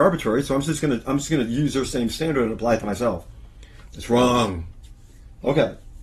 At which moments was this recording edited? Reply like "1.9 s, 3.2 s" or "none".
3.9 s